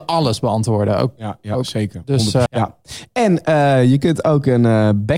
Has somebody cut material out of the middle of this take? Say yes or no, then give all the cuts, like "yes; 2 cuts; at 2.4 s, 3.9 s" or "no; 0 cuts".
yes; 1 cut; at 2.5 s